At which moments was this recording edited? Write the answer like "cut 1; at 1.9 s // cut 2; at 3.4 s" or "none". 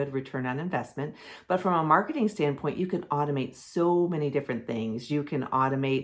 none

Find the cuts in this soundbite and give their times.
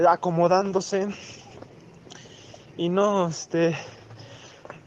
none

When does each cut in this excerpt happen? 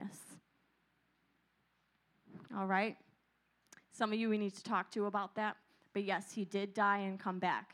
cut 1; at 2.5 s

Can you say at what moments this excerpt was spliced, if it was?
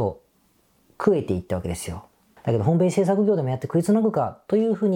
cut 1; at 2.4 s

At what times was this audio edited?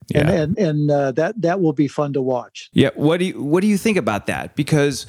cut 1; at 2.7 s

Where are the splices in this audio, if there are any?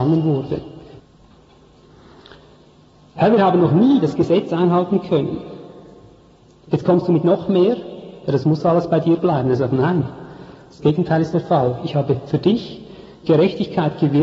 cut 1; at 1.0 s

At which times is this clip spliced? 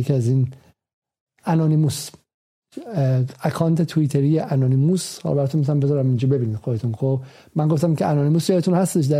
none

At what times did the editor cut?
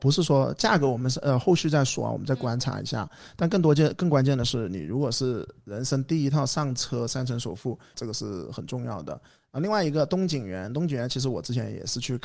cut 1; at 7.9 s

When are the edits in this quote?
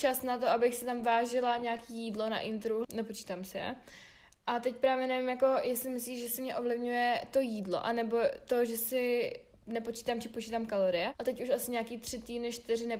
cut 1; at 2.8 s // cut 2; at 11.1 s

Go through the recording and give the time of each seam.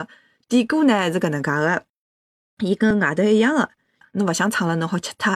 none

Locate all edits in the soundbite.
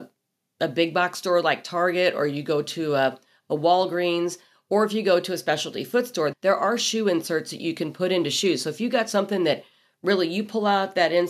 cut 1; at 6.3 s

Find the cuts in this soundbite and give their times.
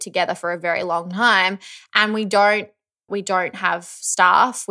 cut 1; at 3.1 s

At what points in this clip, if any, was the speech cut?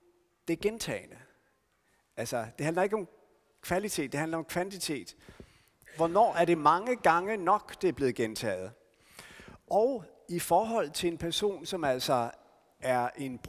none

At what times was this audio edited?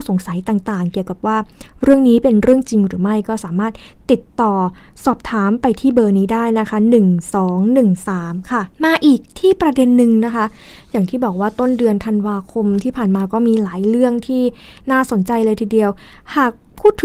cut 1; at 8.7 s

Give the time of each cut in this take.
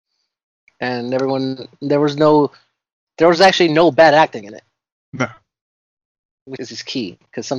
cut 1; at 6.6 s

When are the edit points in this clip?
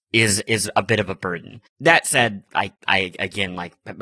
cut 1; at 1.7 s // cut 2; at 2.8 s

